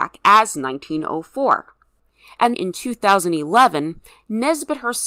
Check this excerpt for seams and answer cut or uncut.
cut